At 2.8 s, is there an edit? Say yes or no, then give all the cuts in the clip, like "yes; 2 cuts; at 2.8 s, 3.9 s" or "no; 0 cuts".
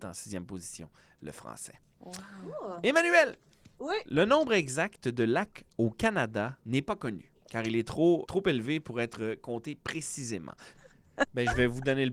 no; 2 cuts; at 8.3 s, 10.7 s